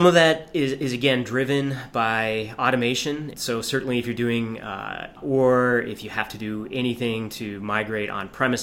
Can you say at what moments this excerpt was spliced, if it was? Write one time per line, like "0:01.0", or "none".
0:03.3
0:05.1